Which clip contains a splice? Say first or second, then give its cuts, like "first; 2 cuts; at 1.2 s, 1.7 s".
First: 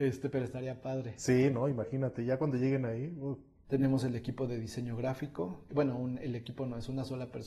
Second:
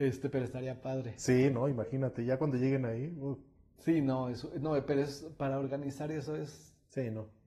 first; 2 cuts; at 3.6 s, 5.7 s